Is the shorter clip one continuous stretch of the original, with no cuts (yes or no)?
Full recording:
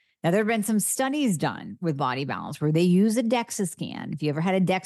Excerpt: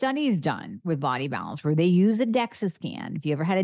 yes